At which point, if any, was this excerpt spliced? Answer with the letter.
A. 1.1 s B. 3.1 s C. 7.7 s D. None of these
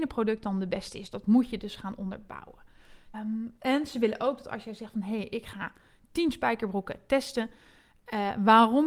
B